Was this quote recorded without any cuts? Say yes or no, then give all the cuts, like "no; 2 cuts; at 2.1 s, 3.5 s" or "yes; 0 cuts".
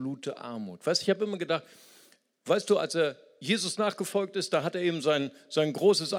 yes; 0 cuts